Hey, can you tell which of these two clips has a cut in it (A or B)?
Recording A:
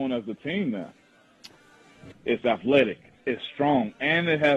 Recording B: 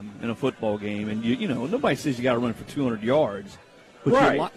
A